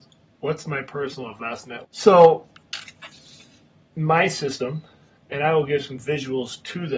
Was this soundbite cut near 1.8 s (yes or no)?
yes